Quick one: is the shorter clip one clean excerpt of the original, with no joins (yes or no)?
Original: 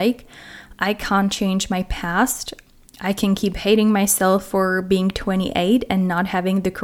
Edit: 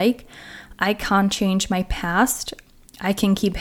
yes